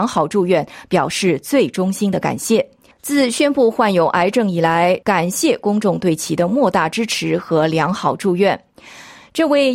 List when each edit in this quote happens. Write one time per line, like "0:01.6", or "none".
0:02.9
0:05.0